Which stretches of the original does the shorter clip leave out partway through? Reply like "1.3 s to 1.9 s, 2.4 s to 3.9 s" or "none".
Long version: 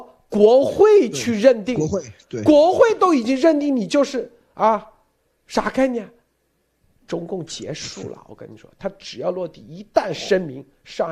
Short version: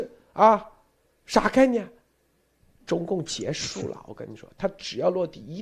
none